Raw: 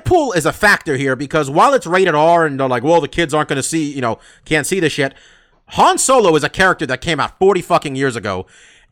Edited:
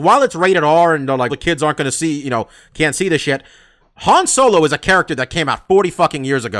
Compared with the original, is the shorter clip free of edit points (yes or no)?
no